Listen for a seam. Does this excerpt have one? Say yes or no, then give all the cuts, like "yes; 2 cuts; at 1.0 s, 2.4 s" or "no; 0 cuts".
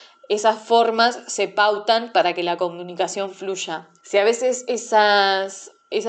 yes; 1 cut; at 4.0 s